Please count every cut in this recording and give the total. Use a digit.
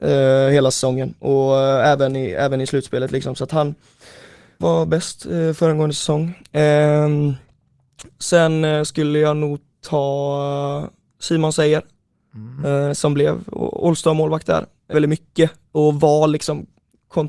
2